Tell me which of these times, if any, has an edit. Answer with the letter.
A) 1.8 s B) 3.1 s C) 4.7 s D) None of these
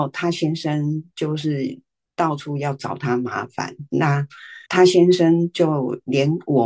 C